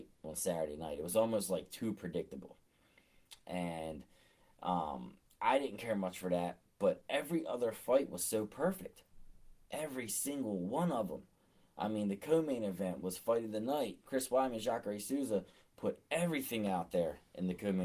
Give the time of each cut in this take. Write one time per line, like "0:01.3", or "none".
none